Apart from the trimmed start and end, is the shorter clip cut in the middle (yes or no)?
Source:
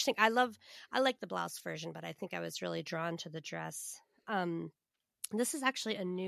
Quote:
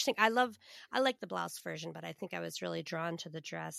no